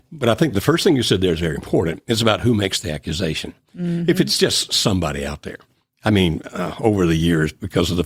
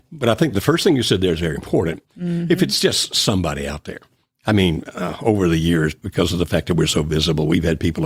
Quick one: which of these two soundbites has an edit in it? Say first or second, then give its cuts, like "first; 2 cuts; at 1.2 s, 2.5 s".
second; 1 cut; at 2.0 s